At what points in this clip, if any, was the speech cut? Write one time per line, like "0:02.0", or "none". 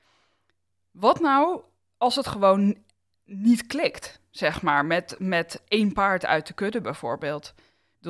none